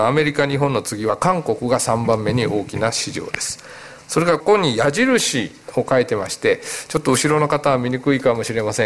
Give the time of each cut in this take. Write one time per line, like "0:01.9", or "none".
0:04.4